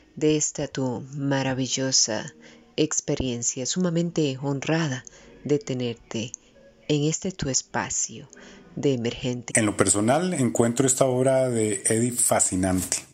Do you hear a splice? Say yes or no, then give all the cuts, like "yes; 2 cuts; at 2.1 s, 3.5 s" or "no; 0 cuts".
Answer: yes; 1 cut; at 9.5 s